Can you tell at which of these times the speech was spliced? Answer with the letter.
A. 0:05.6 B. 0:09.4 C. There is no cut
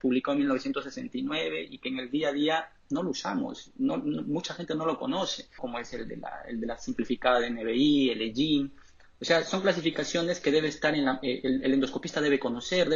A